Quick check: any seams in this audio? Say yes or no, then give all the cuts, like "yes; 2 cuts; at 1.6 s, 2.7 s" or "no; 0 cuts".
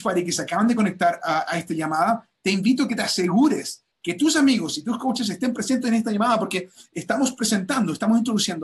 no; 0 cuts